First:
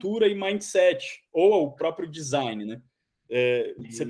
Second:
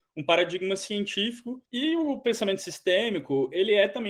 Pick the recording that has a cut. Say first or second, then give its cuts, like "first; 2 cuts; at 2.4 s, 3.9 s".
second; 1 cut; at 1.7 s